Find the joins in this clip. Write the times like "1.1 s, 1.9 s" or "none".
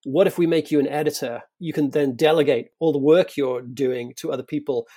none